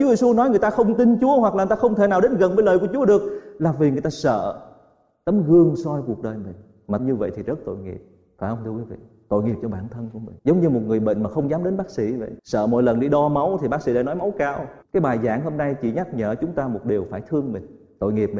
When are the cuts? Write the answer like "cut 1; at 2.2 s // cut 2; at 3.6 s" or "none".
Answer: cut 1; at 10.4 s // cut 2; at 12.4 s